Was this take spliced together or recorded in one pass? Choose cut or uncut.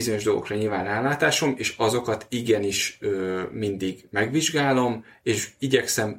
uncut